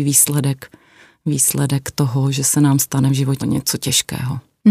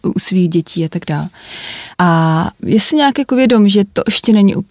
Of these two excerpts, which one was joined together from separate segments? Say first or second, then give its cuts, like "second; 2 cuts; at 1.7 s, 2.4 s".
first; 1 cut; at 3.4 s